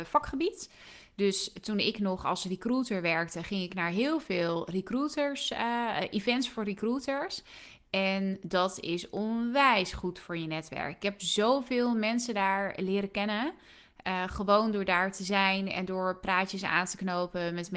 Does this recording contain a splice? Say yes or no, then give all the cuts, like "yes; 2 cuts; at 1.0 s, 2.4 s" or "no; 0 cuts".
no; 0 cuts